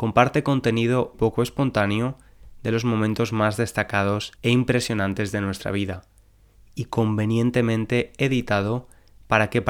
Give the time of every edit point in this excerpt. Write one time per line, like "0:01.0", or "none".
0:01.1
0:04.3